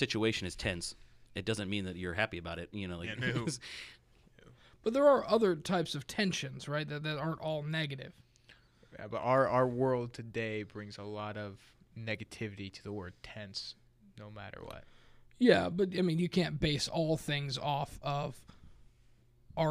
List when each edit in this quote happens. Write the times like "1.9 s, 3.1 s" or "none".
none